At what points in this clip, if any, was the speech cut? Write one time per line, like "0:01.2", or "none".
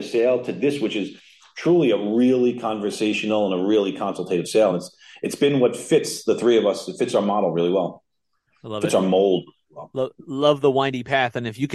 none